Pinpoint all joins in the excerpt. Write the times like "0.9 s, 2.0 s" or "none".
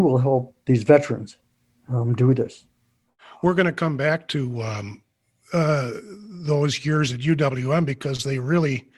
none